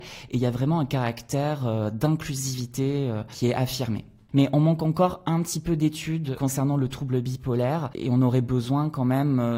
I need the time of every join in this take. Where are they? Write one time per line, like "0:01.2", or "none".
0:04.3

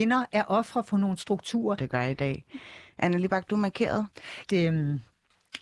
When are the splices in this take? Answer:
0:01.8
0:04.5

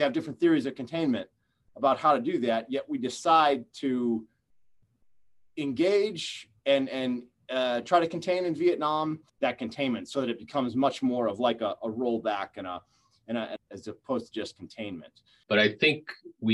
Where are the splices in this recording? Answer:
0:09.3
0:13.6
0:15.4

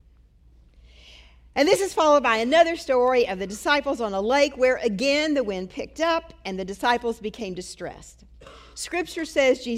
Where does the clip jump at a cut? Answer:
none

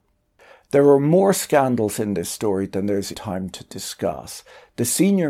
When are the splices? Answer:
0:03.1

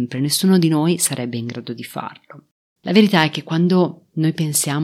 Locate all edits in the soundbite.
0:02.8

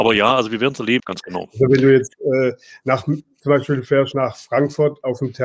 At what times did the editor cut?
0:01.0

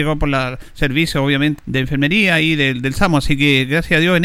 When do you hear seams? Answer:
0:01.6

